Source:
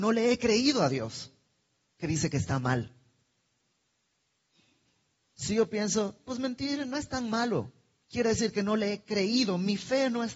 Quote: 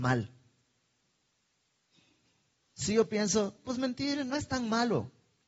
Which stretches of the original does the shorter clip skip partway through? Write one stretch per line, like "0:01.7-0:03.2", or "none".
none